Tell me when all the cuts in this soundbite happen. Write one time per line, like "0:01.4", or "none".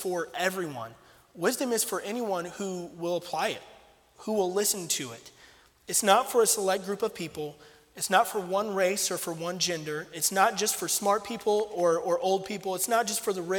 none